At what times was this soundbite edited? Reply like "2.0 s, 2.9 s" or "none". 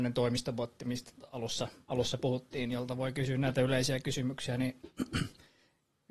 none